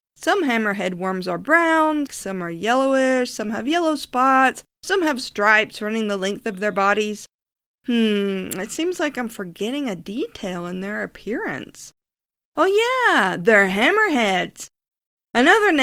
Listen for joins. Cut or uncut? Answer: cut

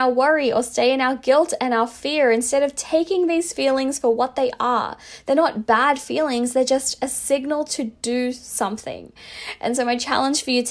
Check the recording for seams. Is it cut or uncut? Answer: uncut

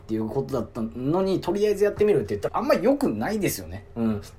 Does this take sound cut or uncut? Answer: cut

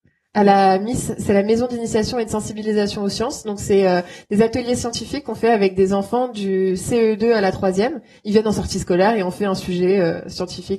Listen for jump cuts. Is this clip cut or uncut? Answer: uncut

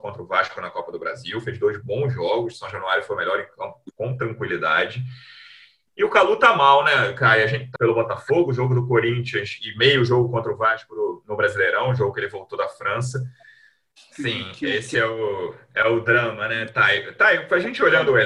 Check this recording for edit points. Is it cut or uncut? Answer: cut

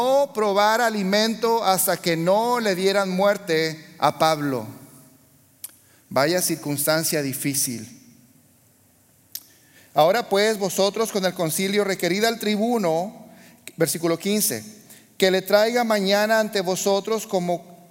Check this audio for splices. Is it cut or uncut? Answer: uncut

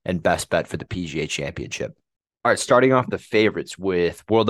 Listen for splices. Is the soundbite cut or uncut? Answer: uncut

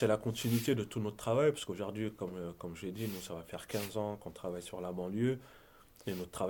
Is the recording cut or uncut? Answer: uncut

